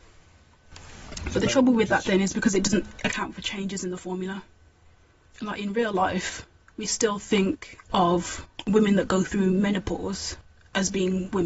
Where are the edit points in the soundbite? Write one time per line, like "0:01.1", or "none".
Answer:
none